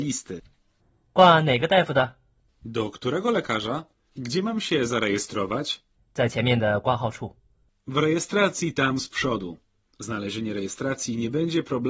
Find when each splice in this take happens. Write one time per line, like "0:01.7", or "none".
0:04.1